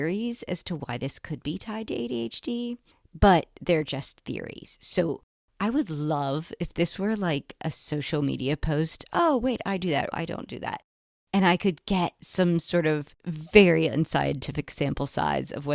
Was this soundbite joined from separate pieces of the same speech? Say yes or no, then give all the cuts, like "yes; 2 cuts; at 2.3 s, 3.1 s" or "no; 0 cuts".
yes; 3 cuts; at 9.1 s, 10.1 s, 13.2 s